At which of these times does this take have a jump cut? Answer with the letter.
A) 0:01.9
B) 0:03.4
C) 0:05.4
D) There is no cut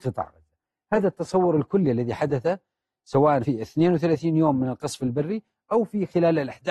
B